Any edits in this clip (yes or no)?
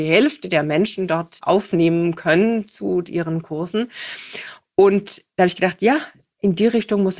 no